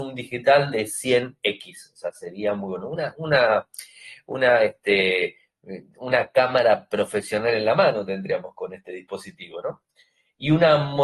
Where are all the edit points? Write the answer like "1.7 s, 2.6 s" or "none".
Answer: none